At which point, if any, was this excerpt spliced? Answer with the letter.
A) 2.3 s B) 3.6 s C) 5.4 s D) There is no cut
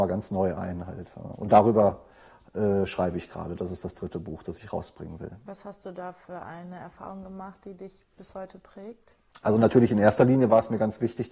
D